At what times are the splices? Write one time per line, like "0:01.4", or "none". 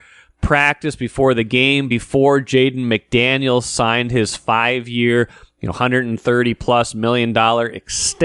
none